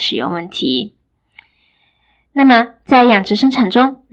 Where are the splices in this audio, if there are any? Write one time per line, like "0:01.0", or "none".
none

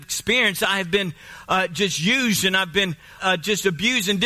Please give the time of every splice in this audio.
0:03.2

